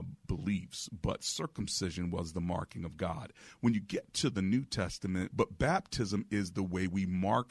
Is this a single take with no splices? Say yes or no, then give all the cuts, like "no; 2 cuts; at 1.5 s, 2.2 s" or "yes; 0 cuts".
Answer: no; 1 cut; at 5.3 s